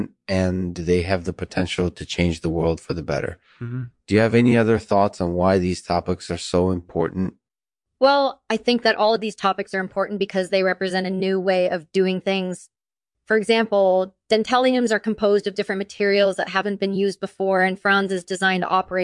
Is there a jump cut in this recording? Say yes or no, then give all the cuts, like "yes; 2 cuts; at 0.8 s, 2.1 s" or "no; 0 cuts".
no; 0 cuts